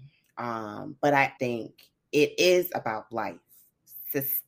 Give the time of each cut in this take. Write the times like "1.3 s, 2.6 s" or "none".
1.4 s